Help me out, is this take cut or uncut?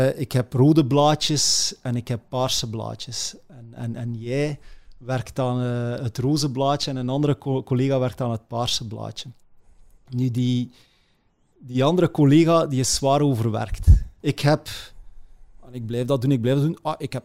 cut